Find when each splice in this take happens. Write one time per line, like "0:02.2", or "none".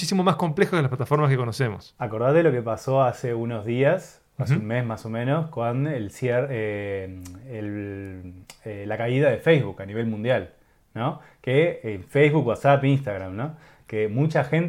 none